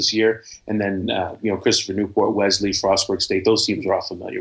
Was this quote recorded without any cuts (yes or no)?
yes